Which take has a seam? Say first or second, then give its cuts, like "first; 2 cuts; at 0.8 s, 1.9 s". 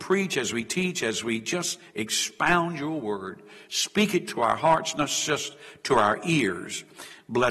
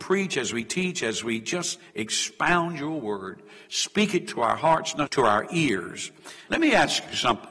second; 2 cuts; at 5.1 s, 6.5 s